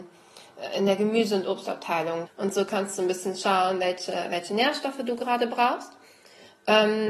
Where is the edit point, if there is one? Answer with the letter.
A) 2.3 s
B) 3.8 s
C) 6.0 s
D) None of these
A